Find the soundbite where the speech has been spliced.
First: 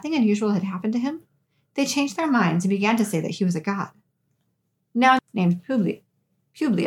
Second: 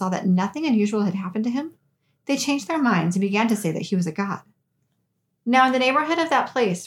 first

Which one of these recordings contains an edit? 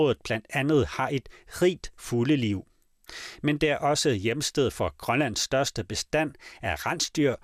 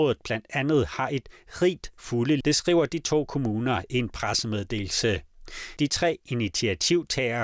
second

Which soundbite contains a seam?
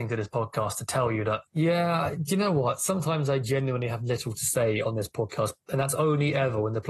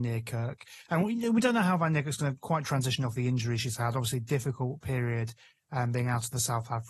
first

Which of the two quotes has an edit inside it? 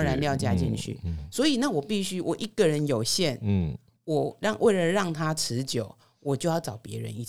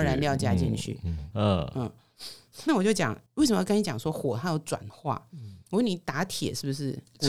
second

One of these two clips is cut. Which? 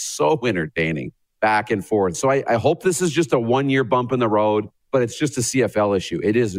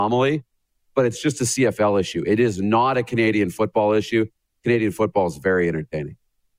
first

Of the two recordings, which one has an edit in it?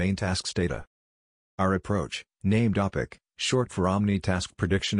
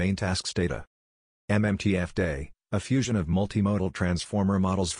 first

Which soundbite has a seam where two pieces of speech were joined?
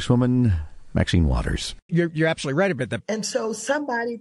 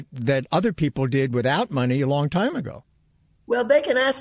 first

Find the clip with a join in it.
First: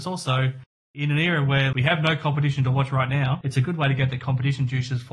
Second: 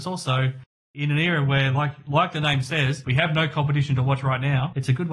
first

